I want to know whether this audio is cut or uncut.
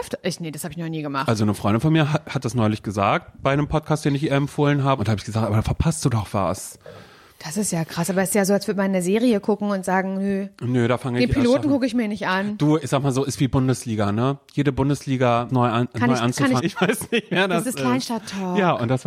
cut